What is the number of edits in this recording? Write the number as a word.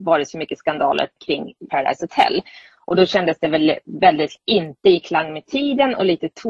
one